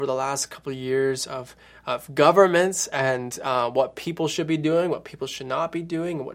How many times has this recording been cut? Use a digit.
0